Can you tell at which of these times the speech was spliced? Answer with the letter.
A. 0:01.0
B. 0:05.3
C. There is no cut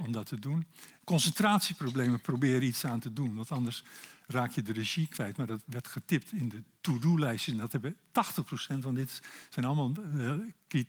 A